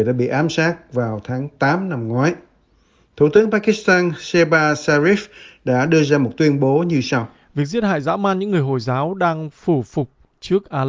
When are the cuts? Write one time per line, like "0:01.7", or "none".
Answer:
none